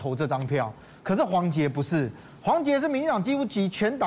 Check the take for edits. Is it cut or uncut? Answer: cut